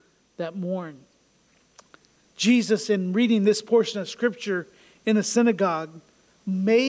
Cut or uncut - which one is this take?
uncut